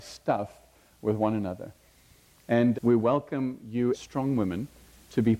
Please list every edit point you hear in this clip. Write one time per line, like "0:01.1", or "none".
0:02.7
0:03.9